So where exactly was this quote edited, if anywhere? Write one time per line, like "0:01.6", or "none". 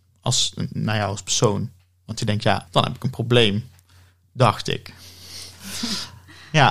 0:02.7